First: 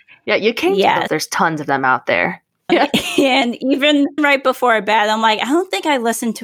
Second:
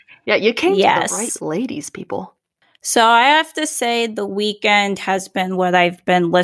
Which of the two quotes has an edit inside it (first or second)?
first